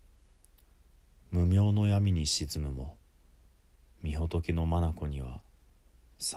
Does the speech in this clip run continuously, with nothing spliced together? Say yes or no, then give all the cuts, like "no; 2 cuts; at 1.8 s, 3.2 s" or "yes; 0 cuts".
yes; 0 cuts